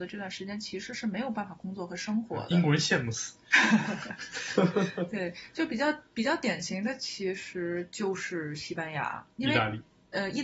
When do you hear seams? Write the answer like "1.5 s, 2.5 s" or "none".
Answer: none